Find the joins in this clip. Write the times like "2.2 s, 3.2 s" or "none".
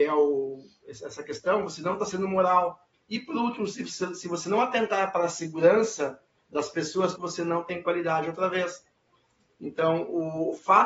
2.9 s, 7.2 s